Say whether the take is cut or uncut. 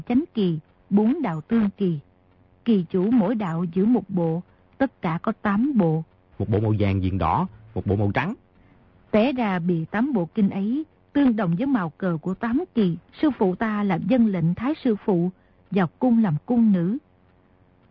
cut